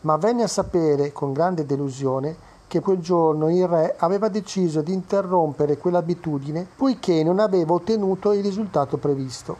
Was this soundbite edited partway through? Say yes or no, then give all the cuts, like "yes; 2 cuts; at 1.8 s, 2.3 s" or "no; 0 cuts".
yes; 2 cuts; at 2.8 s, 6.7 s